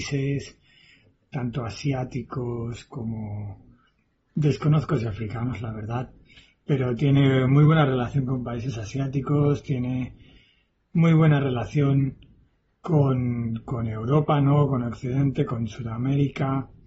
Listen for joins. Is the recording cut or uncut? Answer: uncut